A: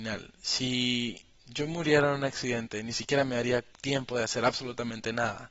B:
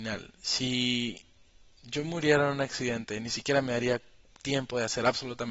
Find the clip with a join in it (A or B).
A